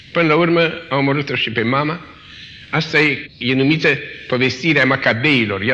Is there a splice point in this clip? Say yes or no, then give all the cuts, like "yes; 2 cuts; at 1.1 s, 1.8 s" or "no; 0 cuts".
no; 0 cuts